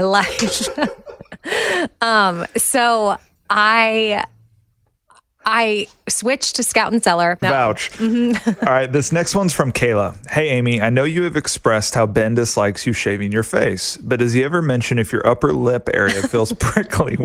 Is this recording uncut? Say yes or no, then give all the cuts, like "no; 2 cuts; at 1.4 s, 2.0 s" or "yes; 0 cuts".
no; 1 cut; at 7.4 s